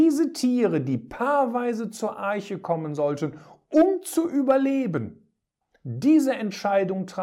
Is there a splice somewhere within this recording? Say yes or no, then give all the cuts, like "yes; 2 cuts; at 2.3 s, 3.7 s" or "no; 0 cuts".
no; 0 cuts